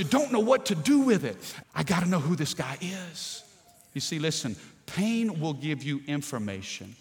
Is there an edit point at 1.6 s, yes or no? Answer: yes